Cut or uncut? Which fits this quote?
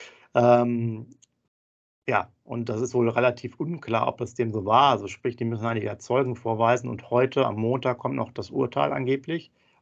uncut